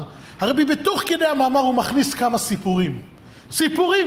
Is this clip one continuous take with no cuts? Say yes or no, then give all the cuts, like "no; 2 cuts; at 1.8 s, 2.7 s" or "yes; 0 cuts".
yes; 0 cuts